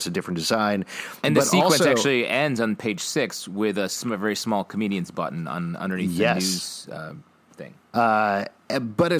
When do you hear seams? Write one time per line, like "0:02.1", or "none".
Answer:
0:07.9